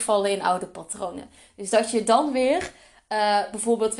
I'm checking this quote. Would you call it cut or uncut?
uncut